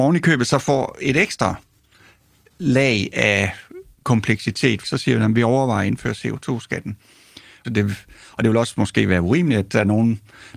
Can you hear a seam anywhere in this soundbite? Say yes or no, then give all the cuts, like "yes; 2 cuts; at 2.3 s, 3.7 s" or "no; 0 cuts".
yes; 2 cuts; at 4.8 s, 7.6 s